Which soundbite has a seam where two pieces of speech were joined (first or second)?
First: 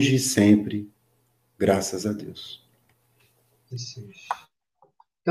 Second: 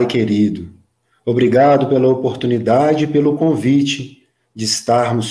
first